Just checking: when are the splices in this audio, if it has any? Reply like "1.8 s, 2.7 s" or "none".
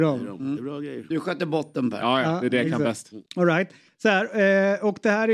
3.3 s